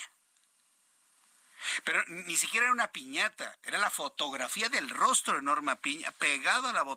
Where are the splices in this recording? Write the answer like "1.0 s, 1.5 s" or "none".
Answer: none